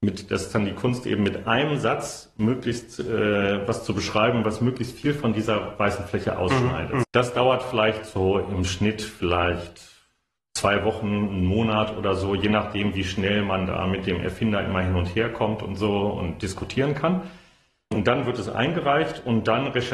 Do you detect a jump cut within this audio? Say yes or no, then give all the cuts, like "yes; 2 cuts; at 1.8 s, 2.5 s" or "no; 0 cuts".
yes; 1 cut; at 7.0 s